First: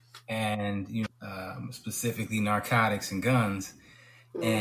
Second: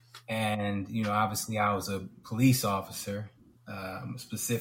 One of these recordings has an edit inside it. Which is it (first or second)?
first